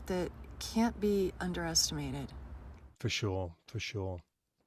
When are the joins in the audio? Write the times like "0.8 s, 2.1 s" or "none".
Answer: 2.9 s